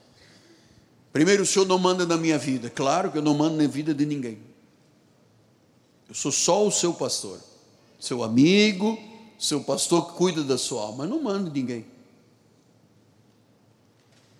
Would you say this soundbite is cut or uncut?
uncut